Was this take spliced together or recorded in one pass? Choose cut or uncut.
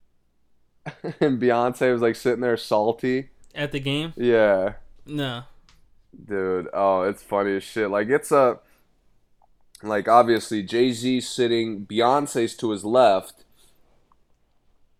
uncut